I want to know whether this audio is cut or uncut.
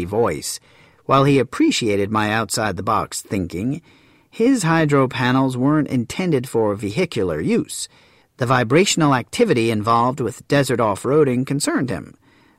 cut